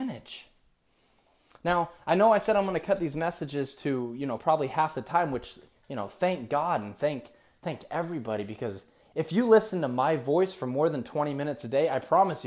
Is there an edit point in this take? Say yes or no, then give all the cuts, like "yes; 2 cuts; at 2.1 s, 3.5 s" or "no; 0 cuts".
no; 0 cuts